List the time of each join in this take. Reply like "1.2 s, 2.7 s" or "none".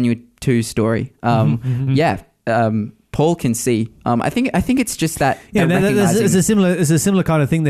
1.9 s